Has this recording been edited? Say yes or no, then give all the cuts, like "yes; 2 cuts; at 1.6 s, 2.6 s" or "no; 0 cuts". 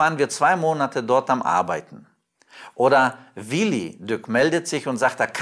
yes; 1 cut; at 2.7 s